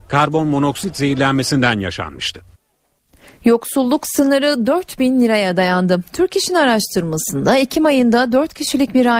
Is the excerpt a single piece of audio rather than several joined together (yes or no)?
yes